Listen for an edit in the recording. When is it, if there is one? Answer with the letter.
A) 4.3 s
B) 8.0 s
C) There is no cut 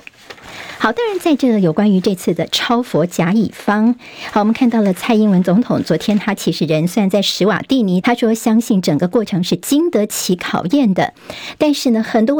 B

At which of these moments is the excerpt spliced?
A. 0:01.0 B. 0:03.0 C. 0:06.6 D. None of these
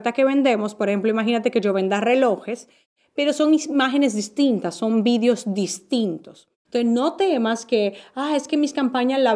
C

